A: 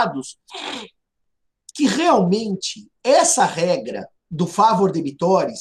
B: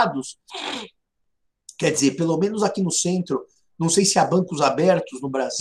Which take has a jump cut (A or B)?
A